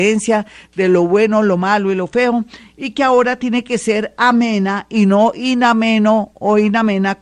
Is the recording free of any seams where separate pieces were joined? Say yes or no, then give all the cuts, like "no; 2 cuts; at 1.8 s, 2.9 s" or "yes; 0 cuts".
yes; 0 cuts